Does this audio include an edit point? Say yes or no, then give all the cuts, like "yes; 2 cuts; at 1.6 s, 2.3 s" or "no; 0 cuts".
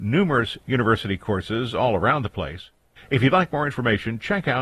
yes; 1 cut; at 3.0 s